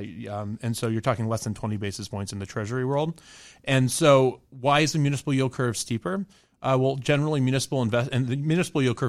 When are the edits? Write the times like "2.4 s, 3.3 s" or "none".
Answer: none